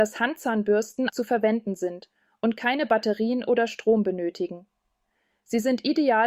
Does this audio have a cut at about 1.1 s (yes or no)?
yes